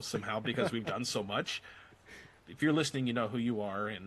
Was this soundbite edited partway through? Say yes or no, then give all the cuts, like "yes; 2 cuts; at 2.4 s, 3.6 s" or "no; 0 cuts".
yes; 1 cut; at 2.4 s